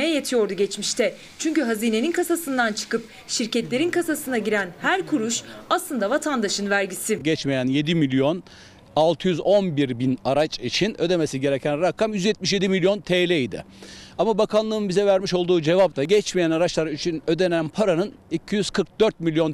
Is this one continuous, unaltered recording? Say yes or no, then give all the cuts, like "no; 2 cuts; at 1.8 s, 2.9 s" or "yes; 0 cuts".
yes; 0 cuts